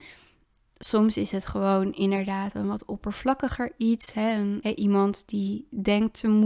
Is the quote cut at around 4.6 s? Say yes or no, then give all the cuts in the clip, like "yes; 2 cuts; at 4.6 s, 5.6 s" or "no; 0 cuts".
yes; 1 cut; at 4.6 s